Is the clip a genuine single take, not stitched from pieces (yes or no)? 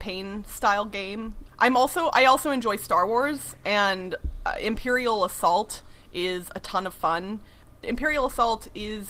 no